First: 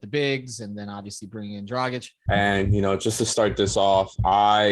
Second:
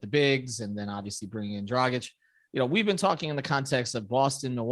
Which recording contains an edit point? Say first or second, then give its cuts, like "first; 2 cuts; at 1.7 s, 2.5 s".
first; 1 cut; at 2.3 s